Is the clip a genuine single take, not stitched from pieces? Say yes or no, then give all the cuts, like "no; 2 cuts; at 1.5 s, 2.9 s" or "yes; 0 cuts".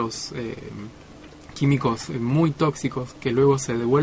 yes; 0 cuts